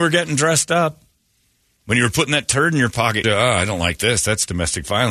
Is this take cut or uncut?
cut